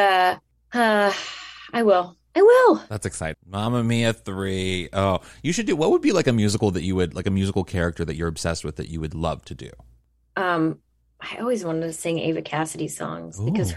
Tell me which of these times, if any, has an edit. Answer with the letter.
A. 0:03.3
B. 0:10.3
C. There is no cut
A